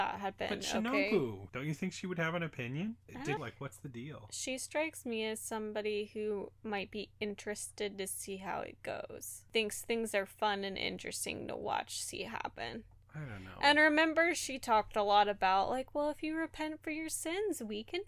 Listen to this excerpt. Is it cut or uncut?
cut